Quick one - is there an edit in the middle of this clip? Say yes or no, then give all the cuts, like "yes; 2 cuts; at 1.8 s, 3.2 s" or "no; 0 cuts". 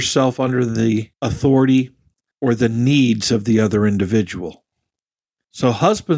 no; 0 cuts